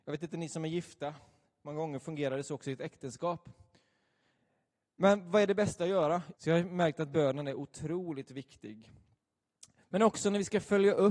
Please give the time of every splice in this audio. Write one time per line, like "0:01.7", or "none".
0:06.3

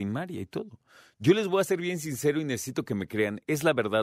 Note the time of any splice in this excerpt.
none

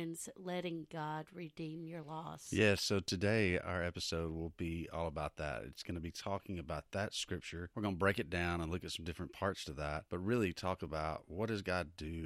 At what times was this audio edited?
none

